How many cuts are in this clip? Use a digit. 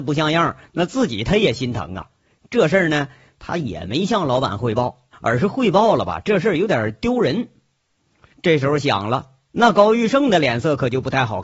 2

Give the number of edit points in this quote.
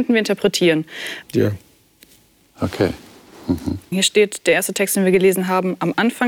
2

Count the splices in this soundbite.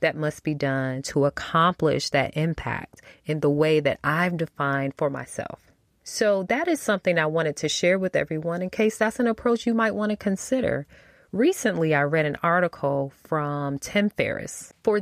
0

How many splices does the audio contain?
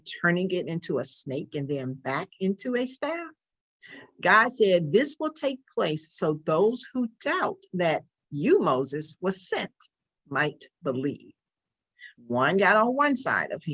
1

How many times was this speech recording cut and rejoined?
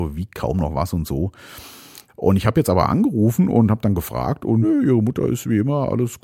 2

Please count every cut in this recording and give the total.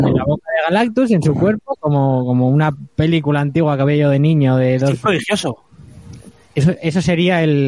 1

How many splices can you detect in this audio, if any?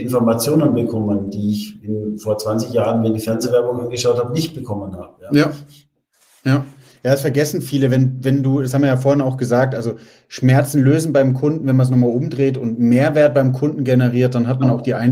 0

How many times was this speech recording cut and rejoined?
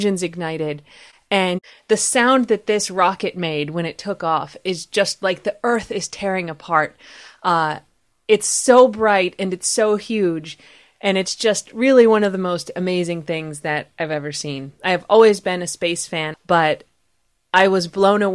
1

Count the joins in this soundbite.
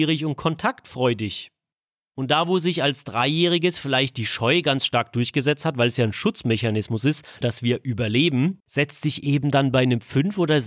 2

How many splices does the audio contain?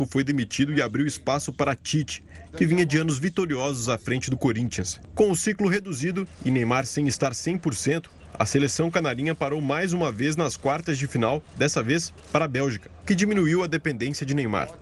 1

